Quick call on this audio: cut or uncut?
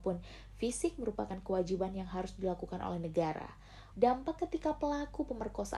cut